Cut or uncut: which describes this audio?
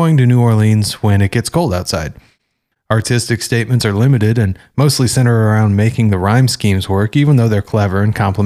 cut